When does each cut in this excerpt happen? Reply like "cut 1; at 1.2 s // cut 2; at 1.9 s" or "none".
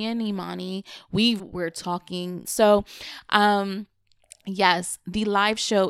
cut 1; at 1.4 s // cut 2; at 2.4 s